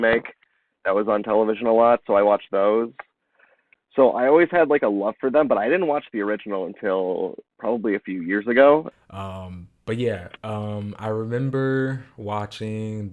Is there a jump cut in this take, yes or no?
yes